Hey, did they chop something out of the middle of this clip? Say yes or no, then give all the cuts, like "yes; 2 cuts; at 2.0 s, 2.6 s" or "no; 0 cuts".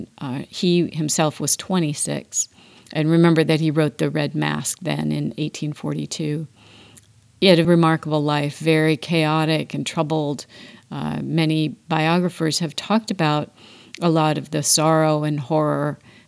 yes; 1 cut; at 7.6 s